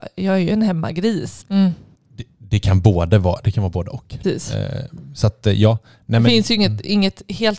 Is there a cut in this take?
yes; 2 cuts; at 1.4 s, 4.2 s

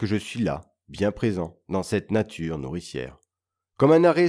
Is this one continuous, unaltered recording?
yes; 0 cuts

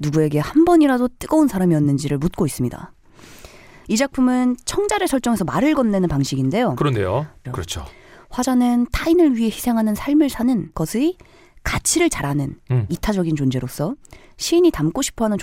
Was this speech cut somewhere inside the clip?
yes; 2 cuts; at 3.8 s, 7.4 s

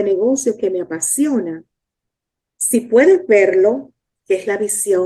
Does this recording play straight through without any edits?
yes; 0 cuts

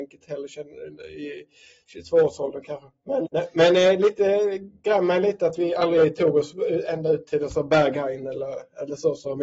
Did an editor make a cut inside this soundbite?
yes; 1 cut; at 3.2 s

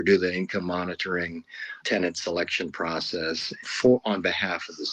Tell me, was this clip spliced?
yes; 2 cuts; at 1.8 s, 3.6 s

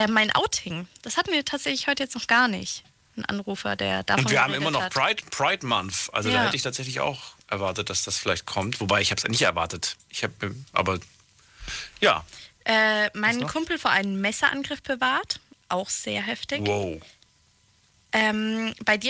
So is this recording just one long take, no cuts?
yes; 0 cuts

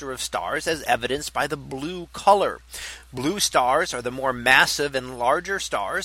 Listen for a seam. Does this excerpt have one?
no; 0 cuts

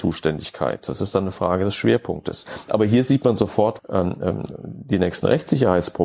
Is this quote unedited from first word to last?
no; 1 cut; at 3.8 s

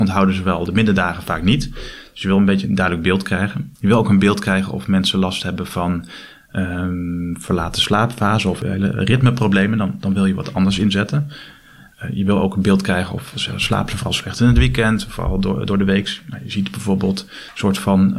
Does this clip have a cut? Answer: no; 0 cuts

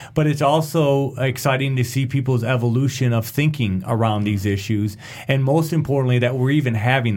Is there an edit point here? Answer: no; 0 cuts

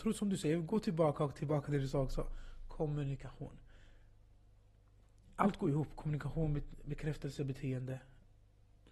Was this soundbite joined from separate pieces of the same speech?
no; 0 cuts

